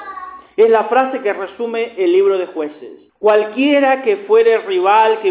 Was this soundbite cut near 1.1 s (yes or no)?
no